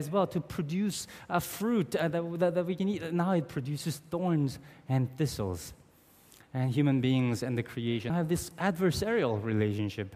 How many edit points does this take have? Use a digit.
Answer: 1